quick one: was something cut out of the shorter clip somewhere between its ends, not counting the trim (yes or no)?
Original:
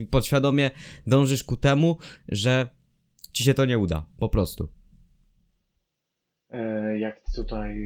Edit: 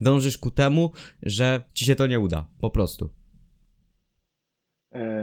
yes